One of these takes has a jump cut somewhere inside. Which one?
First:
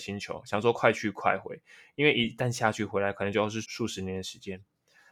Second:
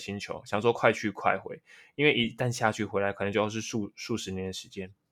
first; 1 cut; at 3.6 s

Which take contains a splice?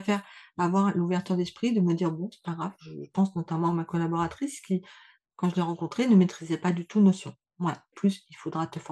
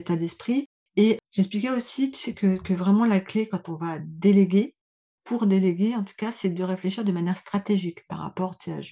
first; 1 cut; at 7.9 s

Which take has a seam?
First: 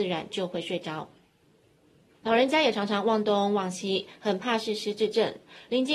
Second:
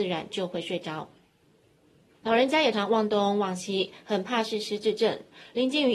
second; 1 cut; at 2.7 s

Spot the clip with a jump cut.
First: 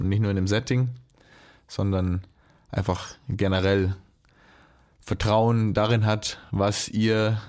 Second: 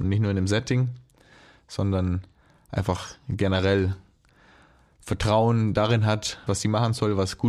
second; 1 cut; at 6.5 s

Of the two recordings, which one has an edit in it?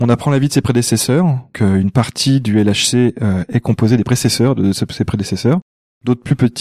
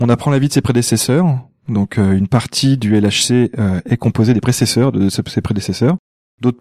first; 1 cut; at 1.5 s

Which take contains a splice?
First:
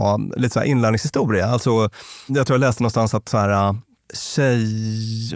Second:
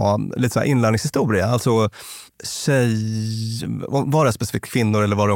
second; 1 cut; at 2.3 s

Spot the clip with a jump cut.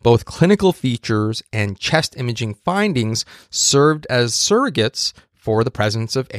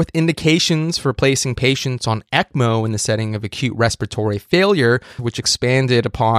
second; 1 cut; at 5.2 s

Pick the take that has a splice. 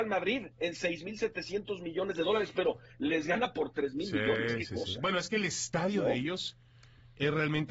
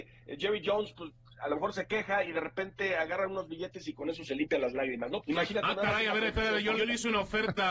second; 2 cuts; at 5.2 s, 6.8 s

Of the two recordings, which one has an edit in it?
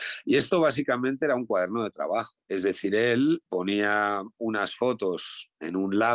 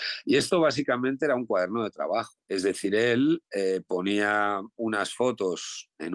first; 1 cut; at 3.5 s

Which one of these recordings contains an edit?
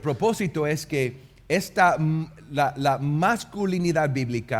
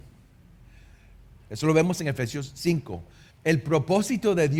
second; 2 cuts; at 1.4 s, 3.3 s

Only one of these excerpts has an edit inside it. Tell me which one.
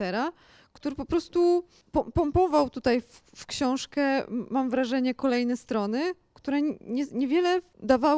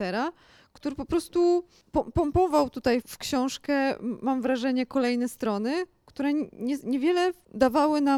second; 1 cut; at 3.0 s

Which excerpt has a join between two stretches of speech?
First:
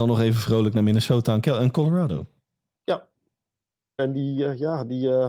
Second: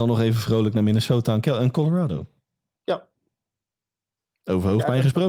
first; 1 cut; at 4.0 s

